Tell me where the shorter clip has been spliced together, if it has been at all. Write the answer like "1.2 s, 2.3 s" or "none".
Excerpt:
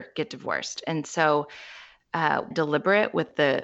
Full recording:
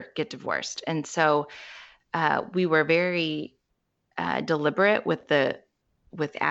2.5 s